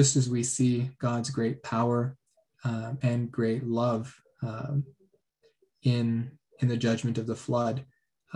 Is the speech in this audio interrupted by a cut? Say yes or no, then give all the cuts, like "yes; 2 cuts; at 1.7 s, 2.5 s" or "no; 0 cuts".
no; 0 cuts